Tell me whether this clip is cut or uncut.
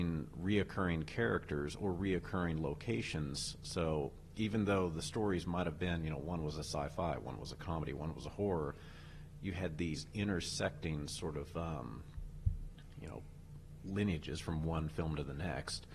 uncut